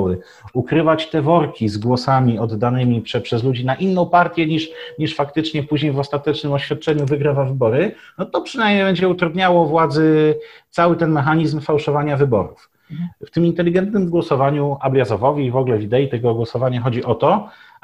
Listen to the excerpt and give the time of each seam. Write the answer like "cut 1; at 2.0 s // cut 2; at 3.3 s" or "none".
cut 1; at 13.1 s